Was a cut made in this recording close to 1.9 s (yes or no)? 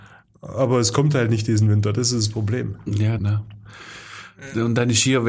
no